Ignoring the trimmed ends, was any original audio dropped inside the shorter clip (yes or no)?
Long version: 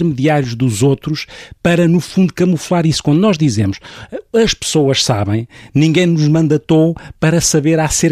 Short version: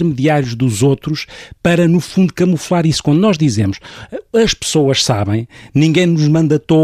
no